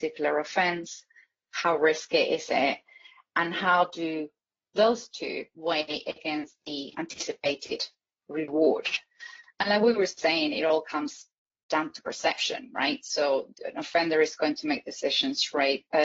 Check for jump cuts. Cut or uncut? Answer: uncut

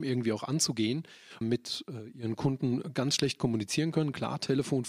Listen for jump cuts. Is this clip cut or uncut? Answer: cut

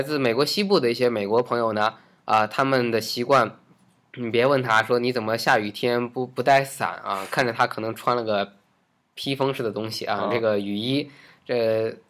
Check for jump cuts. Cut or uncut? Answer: uncut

